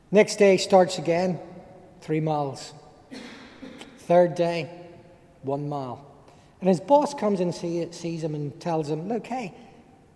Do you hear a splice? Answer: no; 0 cuts

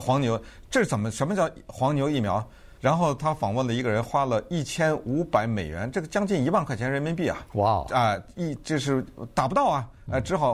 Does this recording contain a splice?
yes; 3 cuts; at 2.8 s, 7.5 s, 9.3 s

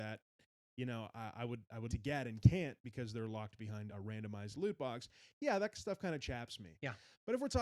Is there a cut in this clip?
yes; 2 cuts; at 1.9 s, 3.9 s

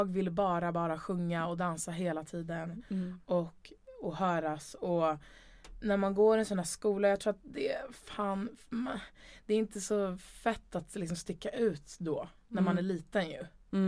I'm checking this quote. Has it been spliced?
no; 0 cuts

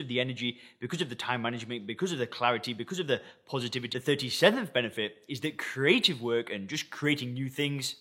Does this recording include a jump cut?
yes; 1 cut; at 3.9 s

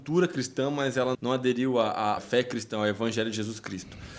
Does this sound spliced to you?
yes; 2 cuts; at 1.1 s, 2.2 s

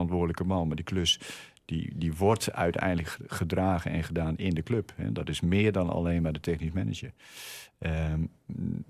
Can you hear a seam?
no; 0 cuts

